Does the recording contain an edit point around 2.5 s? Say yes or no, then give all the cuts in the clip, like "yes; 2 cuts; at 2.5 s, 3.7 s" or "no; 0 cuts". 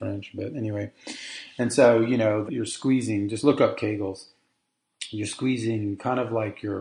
yes; 1 cut; at 2.5 s